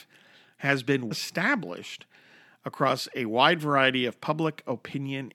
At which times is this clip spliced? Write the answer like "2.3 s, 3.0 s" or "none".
1.1 s